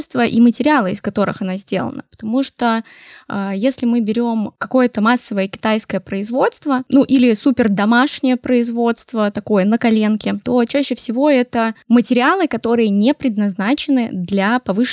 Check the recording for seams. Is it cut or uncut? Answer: uncut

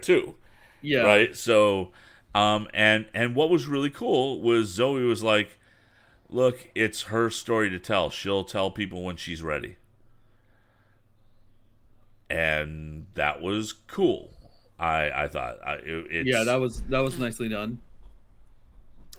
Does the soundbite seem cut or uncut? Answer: uncut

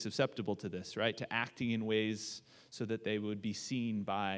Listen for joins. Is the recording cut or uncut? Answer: uncut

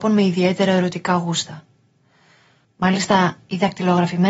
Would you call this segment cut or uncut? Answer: cut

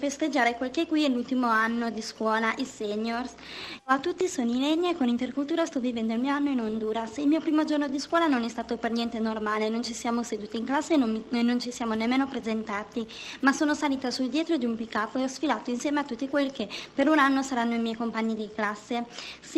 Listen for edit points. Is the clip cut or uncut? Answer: cut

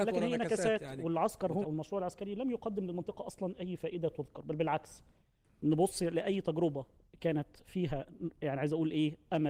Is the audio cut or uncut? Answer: cut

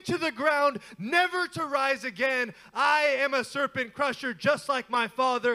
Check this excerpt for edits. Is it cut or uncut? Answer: uncut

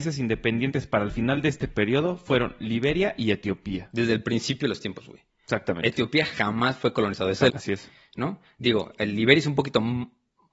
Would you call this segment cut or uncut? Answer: cut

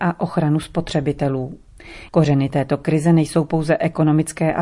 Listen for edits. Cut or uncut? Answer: cut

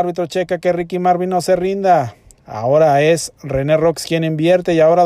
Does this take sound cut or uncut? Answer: cut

